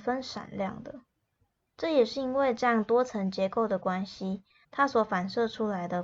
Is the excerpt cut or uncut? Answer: cut